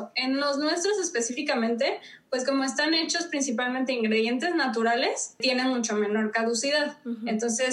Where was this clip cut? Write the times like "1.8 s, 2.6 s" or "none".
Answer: none